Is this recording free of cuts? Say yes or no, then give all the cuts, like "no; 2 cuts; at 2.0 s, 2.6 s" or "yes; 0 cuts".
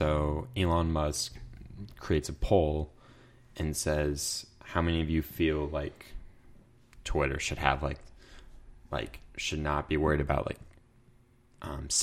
yes; 0 cuts